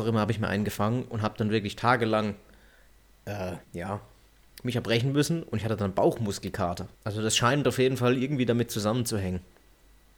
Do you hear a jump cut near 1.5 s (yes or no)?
no